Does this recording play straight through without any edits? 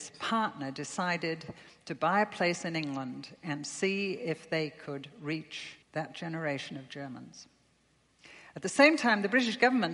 no; 1 cut; at 5.8 s

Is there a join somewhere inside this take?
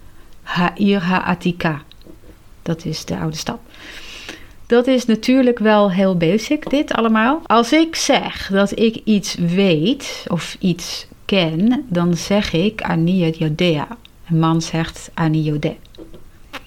yes; 1 cut; at 7.5 s

